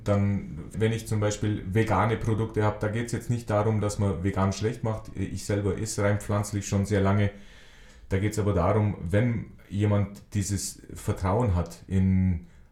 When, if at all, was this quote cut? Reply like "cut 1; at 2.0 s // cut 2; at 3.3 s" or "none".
none